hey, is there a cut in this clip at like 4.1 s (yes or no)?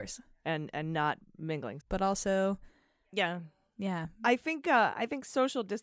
no